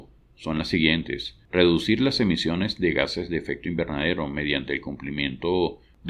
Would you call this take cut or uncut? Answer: uncut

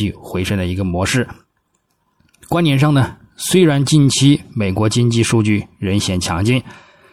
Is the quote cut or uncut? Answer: uncut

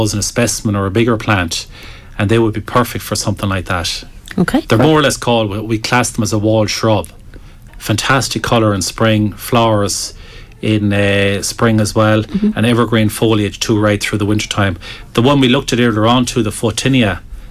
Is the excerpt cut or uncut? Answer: cut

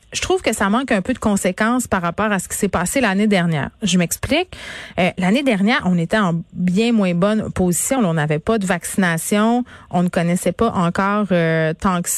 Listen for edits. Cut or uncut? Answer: uncut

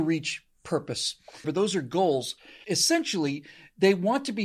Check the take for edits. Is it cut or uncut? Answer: cut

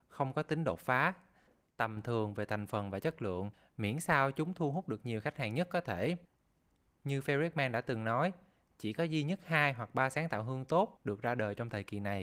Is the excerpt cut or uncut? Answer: uncut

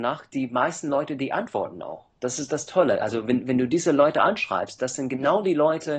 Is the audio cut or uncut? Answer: uncut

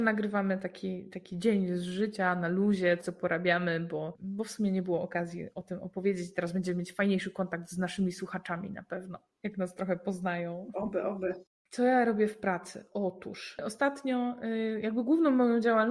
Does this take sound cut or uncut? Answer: cut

